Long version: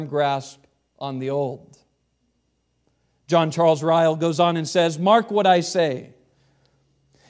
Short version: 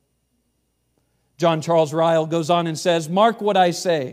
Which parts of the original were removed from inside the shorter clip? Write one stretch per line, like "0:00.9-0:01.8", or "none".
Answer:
none